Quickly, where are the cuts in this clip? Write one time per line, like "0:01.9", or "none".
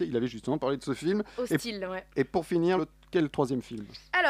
0:02.8